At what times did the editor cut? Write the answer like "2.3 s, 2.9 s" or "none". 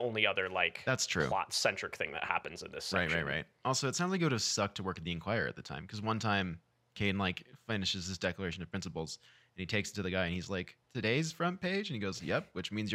10.8 s